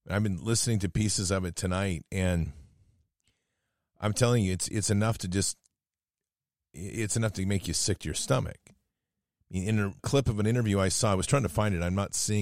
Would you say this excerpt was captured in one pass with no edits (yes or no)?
no